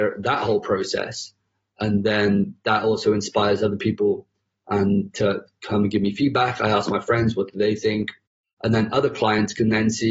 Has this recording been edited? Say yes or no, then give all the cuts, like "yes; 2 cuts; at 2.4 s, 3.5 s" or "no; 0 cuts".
no; 0 cuts